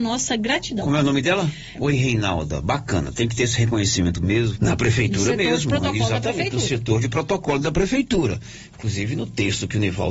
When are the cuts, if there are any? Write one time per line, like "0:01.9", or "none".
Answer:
0:01.7
0:04.6

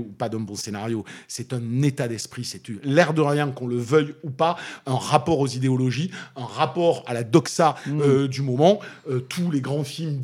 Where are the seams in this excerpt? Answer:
none

